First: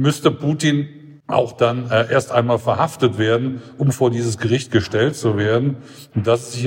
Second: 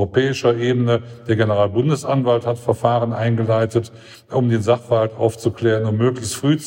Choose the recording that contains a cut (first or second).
first